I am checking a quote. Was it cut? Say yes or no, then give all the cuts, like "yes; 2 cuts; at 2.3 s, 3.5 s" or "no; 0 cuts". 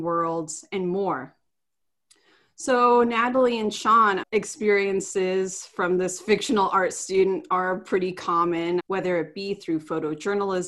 yes; 2 cuts; at 4.2 s, 8.8 s